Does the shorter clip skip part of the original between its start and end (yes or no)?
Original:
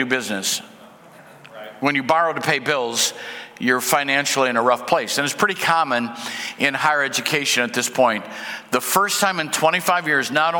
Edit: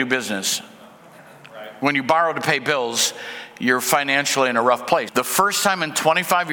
yes